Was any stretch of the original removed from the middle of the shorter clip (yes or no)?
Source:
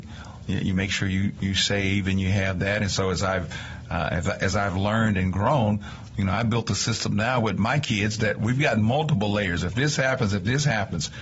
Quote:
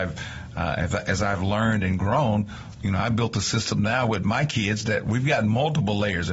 no